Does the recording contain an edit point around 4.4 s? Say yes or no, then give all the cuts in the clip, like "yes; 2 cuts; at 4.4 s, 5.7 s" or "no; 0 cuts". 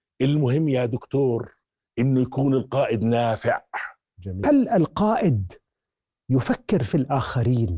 yes; 1 cut; at 4.4 s